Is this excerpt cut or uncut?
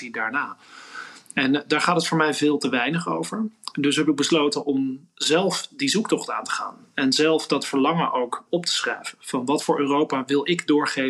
cut